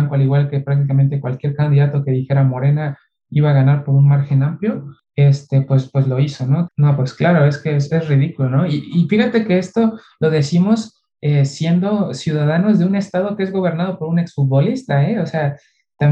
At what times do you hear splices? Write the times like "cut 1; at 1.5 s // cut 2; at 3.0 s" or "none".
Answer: cut 1; at 6.7 s